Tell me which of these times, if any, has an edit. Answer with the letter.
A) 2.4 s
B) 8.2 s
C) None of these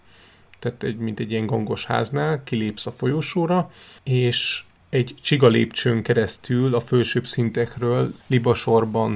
B